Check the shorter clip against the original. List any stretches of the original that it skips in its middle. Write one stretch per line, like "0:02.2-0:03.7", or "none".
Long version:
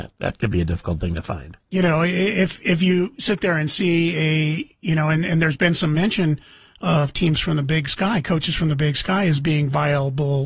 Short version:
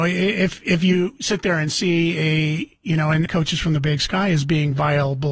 0:05.2-0:08.2